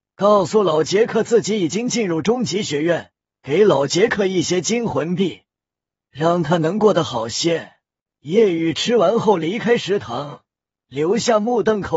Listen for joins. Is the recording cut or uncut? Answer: cut